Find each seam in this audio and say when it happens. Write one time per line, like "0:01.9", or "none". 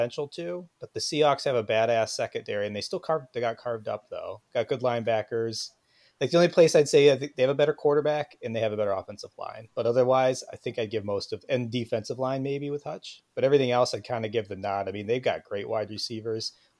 none